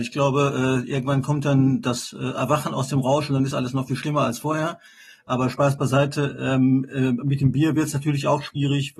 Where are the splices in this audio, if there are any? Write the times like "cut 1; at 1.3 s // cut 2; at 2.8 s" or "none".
none